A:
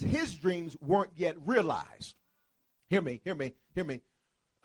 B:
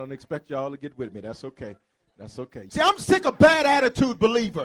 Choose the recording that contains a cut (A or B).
B